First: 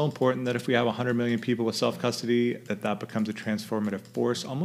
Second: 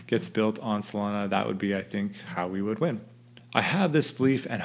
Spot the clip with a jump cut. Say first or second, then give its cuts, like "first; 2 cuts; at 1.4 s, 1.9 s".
second; 1 cut; at 3.4 s